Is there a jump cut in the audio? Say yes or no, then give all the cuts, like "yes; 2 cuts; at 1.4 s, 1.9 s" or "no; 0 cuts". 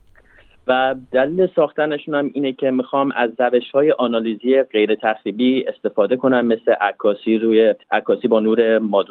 yes; 1 cut; at 7.8 s